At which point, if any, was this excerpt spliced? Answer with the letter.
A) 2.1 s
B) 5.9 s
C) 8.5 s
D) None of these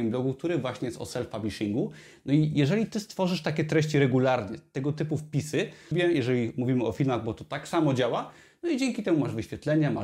B